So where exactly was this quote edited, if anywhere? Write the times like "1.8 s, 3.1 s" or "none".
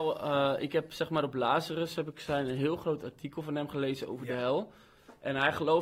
none